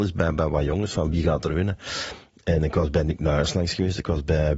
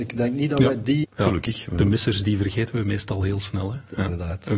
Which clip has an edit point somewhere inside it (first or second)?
second